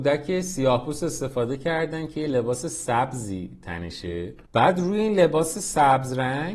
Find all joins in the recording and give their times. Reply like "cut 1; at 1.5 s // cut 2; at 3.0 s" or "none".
cut 1; at 4.5 s